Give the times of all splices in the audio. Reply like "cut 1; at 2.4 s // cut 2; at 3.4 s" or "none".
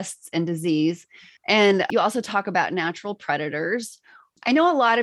cut 1; at 1.4 s